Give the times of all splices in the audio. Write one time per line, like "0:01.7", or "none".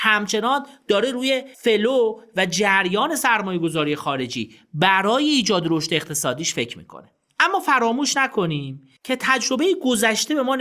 0:01.5
0:09.0